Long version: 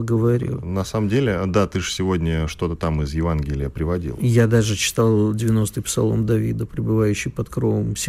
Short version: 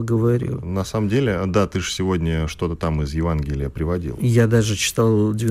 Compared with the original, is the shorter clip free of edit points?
yes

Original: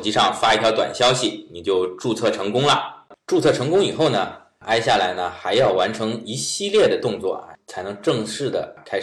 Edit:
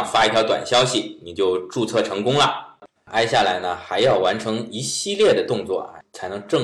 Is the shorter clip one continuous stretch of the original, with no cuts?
no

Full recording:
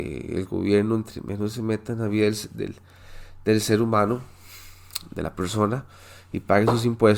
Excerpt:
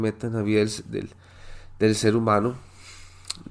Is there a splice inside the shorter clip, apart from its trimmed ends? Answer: no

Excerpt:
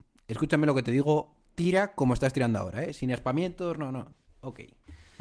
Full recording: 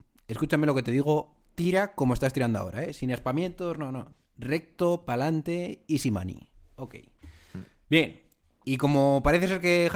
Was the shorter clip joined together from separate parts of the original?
yes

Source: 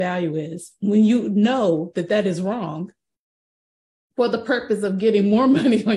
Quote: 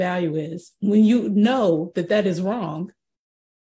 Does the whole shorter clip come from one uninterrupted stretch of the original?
yes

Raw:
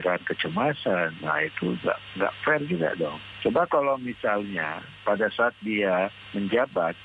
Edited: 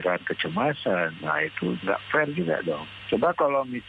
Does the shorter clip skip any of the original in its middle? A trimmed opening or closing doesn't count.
yes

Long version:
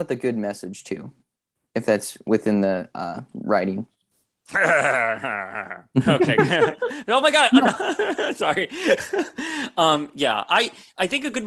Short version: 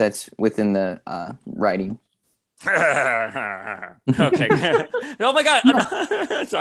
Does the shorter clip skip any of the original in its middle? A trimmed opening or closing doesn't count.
no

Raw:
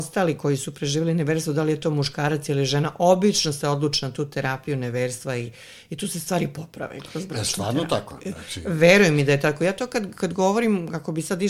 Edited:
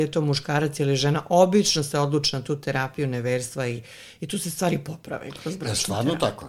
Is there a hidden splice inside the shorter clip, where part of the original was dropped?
no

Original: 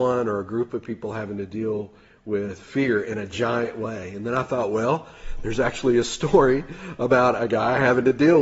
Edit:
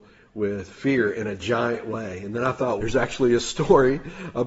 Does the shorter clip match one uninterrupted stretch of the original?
no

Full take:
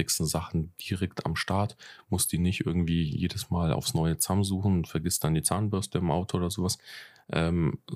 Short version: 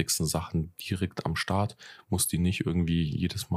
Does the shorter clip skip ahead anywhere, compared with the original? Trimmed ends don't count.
no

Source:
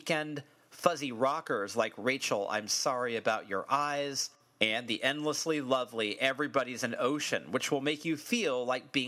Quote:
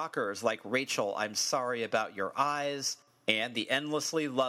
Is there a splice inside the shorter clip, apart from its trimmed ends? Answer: no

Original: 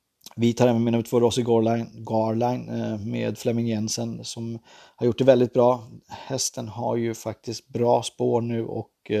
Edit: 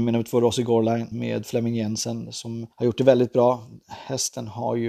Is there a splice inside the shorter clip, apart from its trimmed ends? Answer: yes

